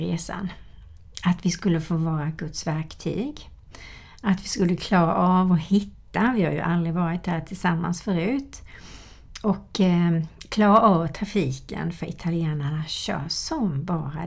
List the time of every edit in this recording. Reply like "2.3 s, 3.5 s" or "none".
none